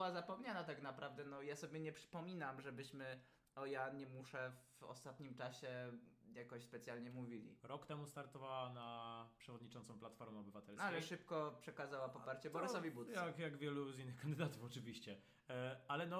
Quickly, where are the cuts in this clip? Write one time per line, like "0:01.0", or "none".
none